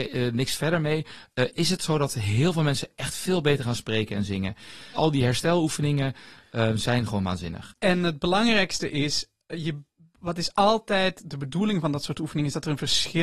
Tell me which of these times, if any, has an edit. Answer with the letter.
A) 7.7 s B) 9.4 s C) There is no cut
A